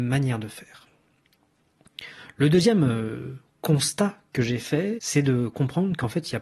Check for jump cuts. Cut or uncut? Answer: cut